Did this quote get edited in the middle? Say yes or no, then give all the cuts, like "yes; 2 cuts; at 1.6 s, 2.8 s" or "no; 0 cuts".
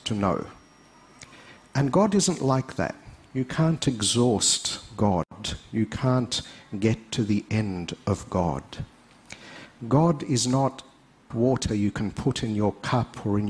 yes; 1 cut; at 11.3 s